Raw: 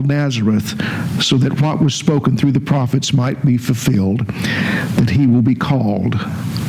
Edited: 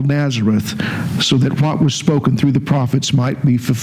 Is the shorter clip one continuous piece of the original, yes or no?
yes